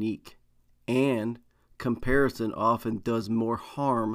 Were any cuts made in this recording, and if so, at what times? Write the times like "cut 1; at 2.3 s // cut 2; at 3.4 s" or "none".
none